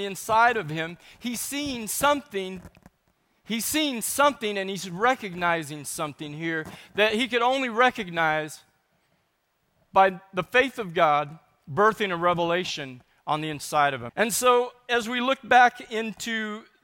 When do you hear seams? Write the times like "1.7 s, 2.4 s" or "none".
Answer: 14.1 s